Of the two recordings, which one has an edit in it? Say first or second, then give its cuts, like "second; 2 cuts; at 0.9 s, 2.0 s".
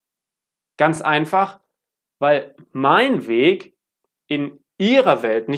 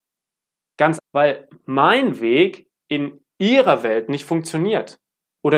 second; 2 cuts; at 1.0 s, 2.8 s